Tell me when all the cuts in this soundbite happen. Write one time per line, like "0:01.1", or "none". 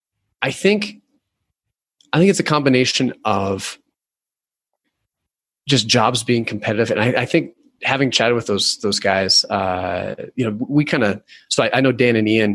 none

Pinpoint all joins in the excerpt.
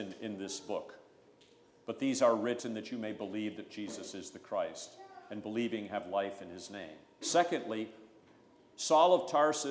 0:07.2

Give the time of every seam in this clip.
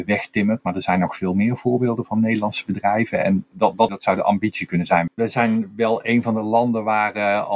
0:03.9
0:05.1

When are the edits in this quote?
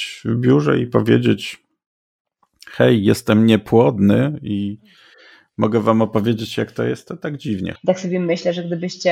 0:07.8

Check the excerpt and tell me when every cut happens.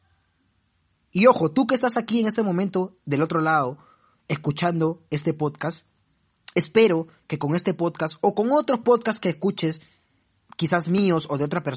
0:00.9

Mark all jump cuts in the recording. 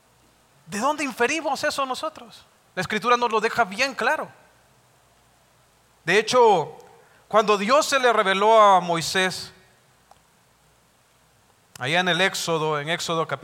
0:02.6

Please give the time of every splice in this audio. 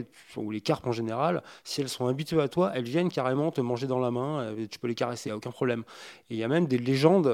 0:05.3

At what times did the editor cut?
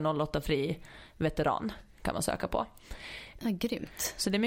0:03.4

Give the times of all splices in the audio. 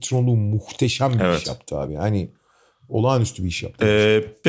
none

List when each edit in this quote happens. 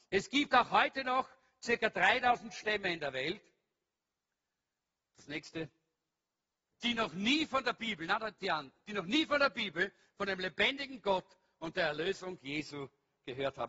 0:06.7

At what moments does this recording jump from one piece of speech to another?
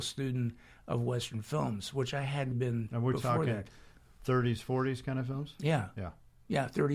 0:02.5

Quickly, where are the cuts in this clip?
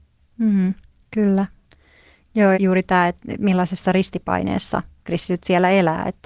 0:02.5

